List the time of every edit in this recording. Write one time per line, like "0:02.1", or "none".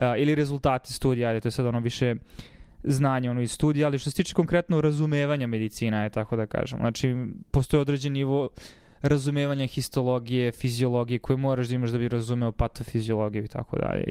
none